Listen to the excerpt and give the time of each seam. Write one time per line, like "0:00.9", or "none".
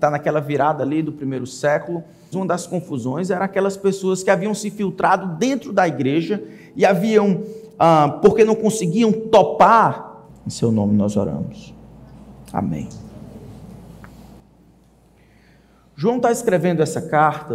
0:02.3
0:10.3